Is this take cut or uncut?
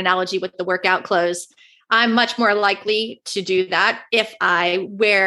uncut